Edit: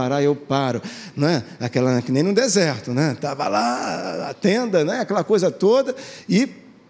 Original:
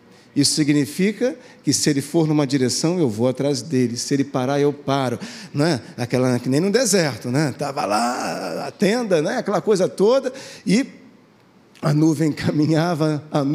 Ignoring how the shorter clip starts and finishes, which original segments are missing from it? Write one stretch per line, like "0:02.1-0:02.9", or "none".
none